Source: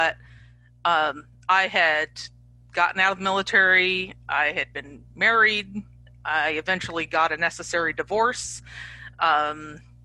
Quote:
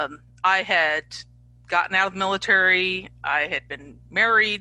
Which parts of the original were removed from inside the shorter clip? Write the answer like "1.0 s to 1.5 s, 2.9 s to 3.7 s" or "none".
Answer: none